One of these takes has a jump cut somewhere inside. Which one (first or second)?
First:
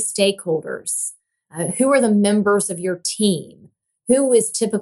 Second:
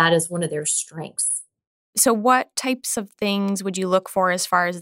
second